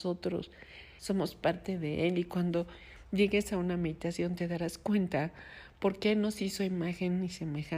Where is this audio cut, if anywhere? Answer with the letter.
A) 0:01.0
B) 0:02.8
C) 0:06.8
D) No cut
A